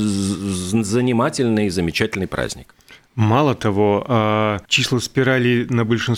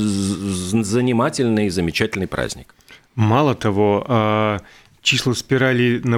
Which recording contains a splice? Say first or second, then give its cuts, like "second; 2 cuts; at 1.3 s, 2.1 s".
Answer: first; 1 cut; at 4.7 s